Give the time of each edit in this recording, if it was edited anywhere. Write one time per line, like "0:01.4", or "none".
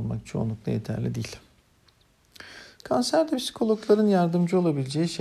0:02.8